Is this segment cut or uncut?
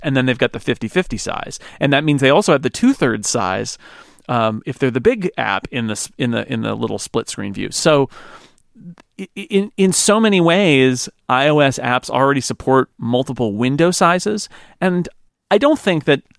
uncut